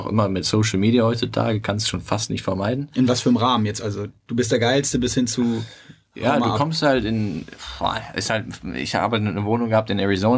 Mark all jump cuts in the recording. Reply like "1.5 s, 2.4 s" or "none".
none